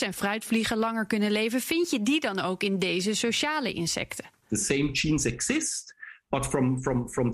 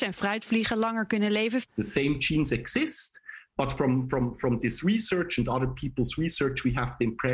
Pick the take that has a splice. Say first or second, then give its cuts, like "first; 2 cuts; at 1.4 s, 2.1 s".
second; 1 cut; at 1.6 s